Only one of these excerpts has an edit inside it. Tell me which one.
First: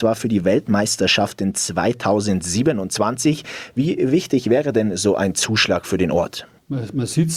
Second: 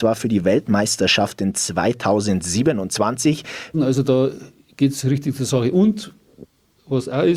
second; 1 cut; at 3.7 s

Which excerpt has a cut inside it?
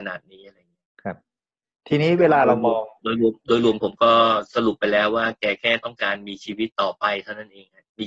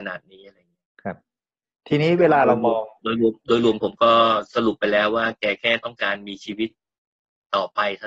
first; 1 cut; at 6.7 s

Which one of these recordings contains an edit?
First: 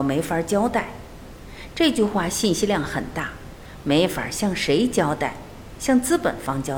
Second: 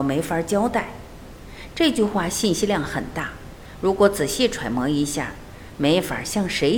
first; 1 cut; at 3.8 s

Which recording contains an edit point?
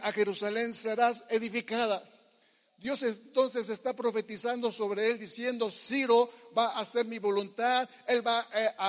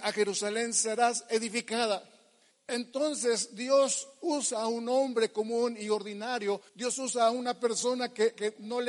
second; 2 cuts; at 2.5 s, 6.7 s

